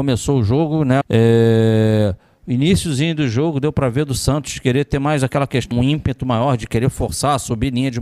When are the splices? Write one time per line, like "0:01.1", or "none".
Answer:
0:01.0
0:05.7